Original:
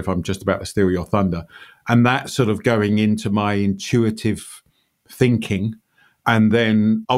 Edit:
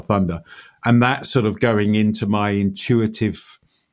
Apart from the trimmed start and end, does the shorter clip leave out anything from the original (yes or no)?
no